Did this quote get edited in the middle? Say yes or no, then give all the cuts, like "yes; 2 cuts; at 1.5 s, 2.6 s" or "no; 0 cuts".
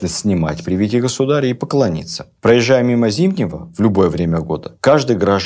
no; 0 cuts